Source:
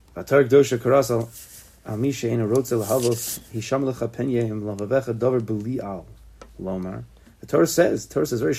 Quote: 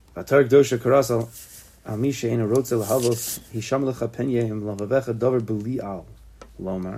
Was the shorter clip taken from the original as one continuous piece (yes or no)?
yes